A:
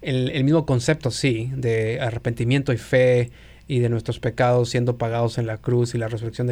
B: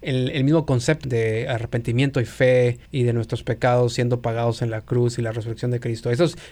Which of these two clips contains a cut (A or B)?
B